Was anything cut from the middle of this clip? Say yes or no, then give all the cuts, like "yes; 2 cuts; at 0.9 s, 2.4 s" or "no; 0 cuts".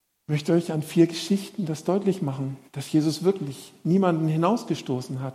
yes; 1 cut; at 2.7 s